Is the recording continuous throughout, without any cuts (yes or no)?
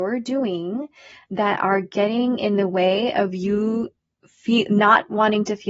yes